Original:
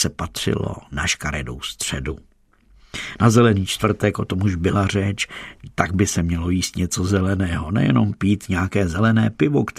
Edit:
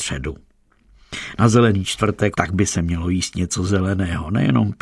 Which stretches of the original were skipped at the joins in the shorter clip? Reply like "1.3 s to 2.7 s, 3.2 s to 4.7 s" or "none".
4.1 s to 5.7 s